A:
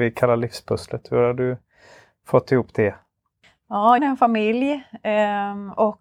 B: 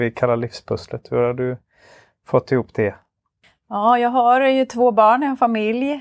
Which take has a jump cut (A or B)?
A